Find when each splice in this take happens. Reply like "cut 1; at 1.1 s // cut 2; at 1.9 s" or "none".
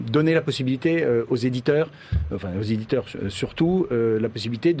cut 1; at 1.3 s